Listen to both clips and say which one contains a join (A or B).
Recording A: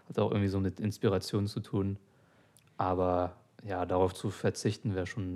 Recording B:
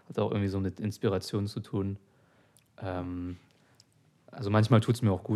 A